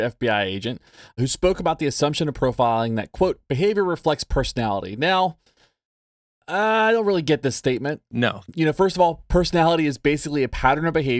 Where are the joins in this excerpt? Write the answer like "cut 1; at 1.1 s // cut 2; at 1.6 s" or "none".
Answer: none